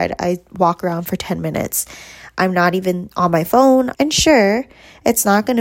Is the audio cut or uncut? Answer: cut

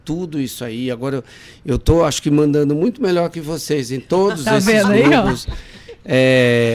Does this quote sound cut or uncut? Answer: uncut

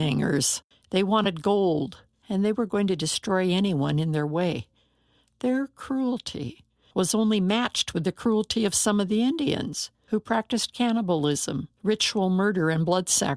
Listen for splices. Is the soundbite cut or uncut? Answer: cut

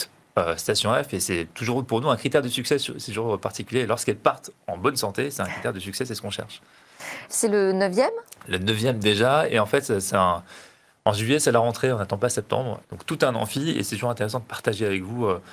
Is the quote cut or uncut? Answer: cut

